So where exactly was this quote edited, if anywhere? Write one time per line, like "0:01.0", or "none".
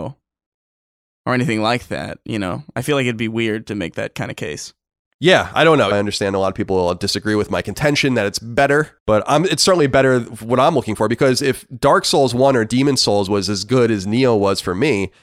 0:05.9
0:09.0